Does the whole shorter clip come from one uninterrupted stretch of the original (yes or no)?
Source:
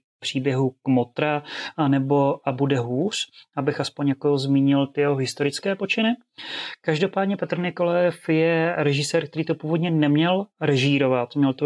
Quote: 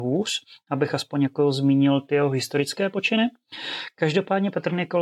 yes